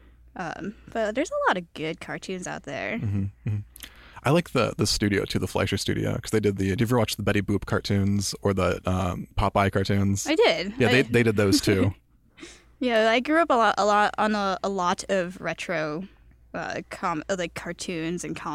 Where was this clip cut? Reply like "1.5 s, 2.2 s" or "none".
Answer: none